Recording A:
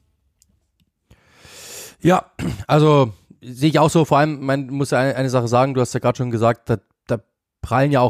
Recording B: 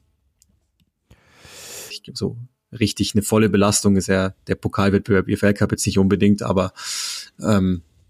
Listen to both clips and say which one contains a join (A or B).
B